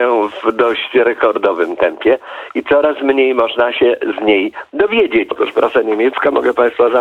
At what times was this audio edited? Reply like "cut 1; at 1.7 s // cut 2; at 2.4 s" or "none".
cut 1; at 5.3 s